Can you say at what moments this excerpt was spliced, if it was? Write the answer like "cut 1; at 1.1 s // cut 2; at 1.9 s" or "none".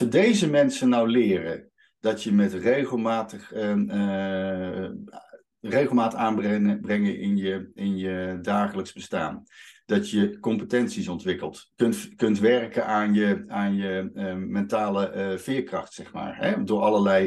cut 1; at 11.7 s